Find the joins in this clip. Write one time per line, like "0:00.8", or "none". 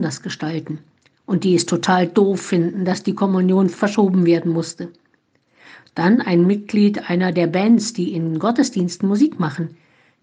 none